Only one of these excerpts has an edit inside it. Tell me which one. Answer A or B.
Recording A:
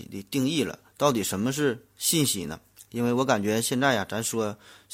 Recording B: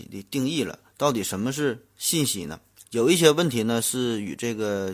B